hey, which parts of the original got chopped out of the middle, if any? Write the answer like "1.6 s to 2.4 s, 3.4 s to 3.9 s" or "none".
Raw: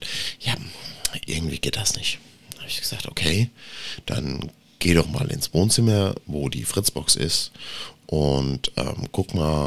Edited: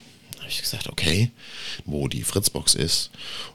4.0 s to 6.2 s